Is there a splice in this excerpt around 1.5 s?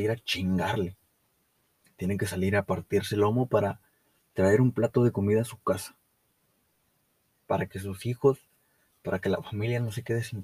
no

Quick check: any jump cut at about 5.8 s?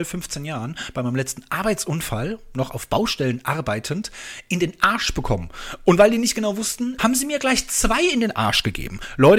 no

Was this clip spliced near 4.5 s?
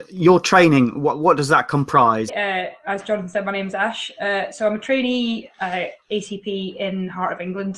no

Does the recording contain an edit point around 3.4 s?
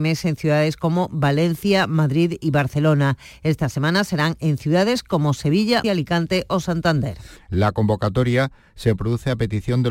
no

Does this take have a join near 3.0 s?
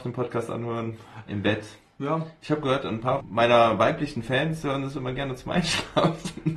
no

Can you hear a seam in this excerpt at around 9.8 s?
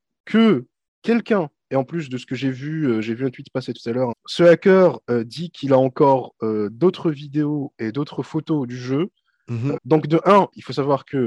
yes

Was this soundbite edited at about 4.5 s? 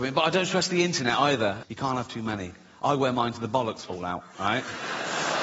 no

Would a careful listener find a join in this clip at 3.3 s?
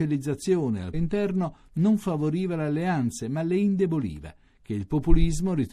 no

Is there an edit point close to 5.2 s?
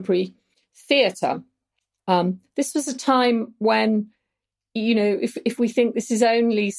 no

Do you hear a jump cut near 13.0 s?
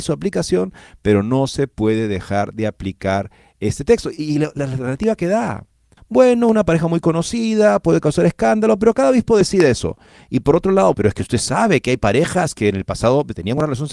no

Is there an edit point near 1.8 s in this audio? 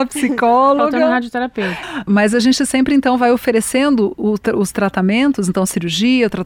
yes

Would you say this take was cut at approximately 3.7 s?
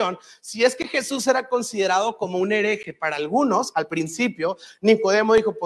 yes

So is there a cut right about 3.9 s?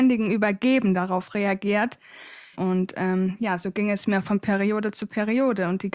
no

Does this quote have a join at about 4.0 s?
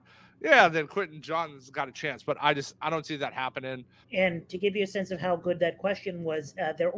yes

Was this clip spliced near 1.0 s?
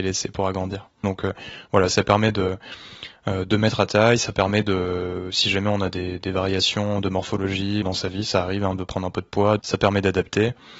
yes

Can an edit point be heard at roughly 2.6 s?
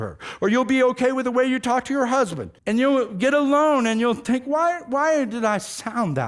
yes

